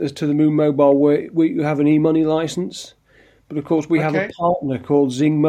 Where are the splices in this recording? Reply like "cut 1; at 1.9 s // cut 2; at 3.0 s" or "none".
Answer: none